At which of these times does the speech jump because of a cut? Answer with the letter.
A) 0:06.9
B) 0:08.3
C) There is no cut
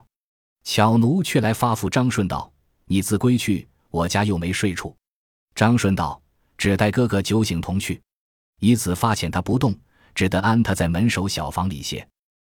C